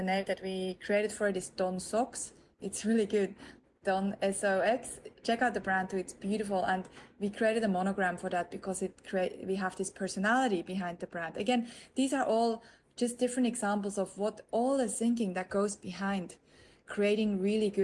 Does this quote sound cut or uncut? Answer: uncut